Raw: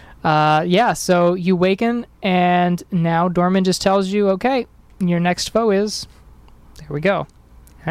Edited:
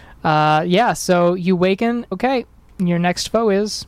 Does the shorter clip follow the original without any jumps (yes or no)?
no